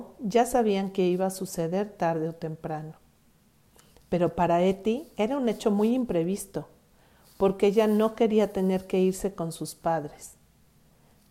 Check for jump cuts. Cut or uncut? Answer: uncut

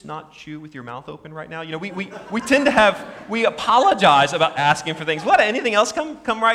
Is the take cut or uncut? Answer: uncut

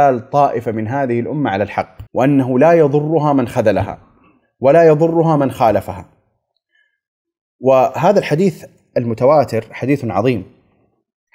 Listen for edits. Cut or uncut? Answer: cut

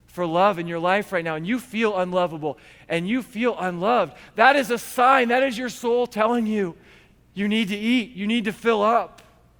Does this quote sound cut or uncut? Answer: uncut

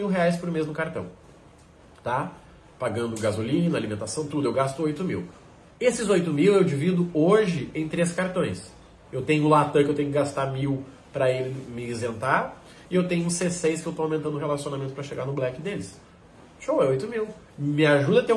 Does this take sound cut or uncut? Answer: cut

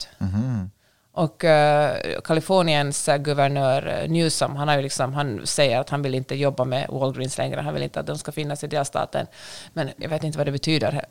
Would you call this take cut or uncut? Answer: uncut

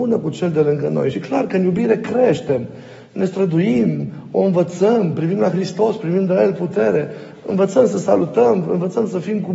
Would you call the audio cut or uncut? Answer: uncut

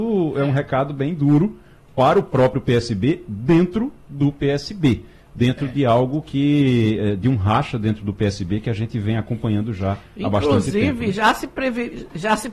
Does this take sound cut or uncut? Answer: uncut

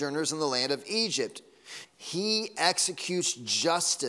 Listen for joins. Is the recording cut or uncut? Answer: cut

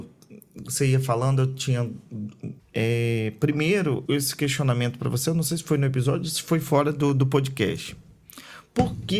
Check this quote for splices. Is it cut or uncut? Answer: cut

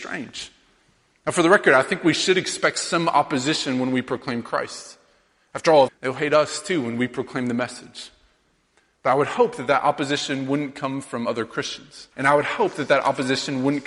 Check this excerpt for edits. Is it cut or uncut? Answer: cut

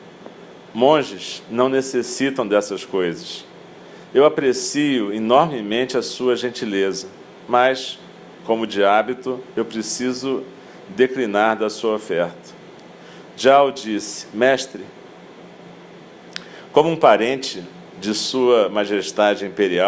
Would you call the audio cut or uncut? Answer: uncut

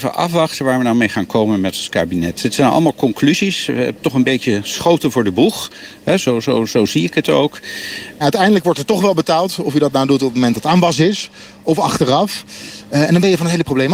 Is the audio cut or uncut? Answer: cut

